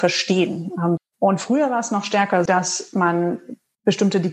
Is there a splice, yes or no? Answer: yes